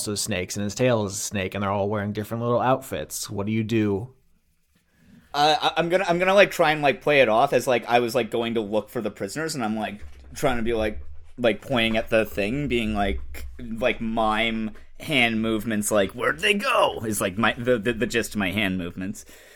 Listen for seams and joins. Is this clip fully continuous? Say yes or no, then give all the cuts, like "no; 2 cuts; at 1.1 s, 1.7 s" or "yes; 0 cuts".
yes; 0 cuts